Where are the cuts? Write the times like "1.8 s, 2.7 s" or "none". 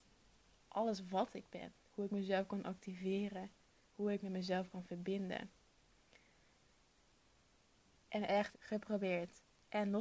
8.5 s